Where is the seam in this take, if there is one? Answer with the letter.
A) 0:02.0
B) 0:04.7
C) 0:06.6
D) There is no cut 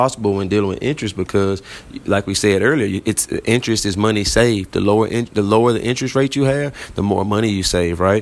D